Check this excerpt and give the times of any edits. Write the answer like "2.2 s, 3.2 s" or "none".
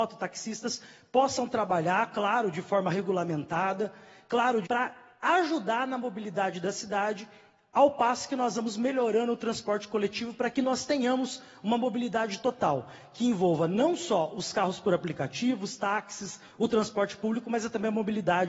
4.6 s